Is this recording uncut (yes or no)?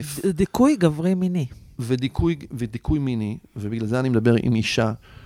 yes